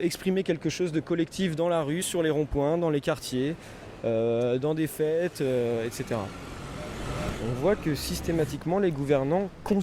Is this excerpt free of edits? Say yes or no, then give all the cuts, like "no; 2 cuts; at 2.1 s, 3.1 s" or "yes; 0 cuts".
yes; 0 cuts